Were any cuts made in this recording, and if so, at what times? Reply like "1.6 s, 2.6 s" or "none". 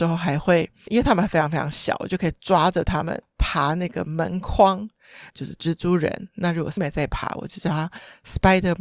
5.3 s, 6.8 s